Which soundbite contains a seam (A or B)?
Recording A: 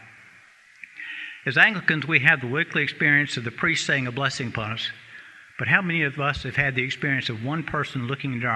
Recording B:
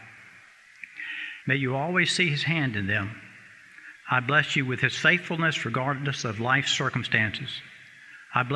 B